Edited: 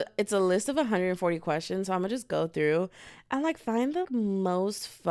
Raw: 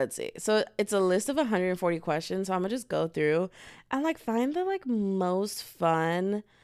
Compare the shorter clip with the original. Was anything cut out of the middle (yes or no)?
yes